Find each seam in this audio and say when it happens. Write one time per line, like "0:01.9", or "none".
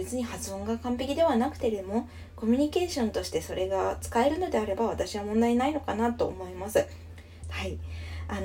0:07.4